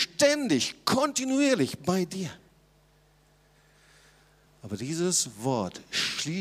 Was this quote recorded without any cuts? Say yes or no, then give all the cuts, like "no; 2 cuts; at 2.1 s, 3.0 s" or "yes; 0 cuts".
no; 1 cut; at 4.5 s